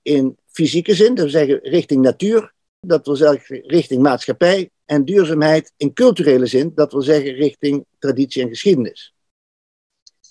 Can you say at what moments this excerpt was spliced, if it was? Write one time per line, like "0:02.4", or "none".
0:02.8